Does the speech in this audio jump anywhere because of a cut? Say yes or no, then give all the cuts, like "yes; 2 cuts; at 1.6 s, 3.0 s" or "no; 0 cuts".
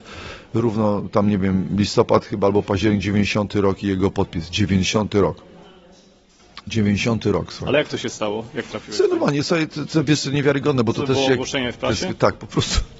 no; 0 cuts